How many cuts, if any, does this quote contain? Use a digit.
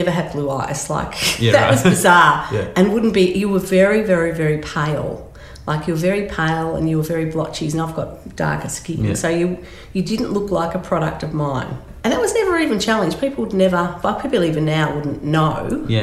0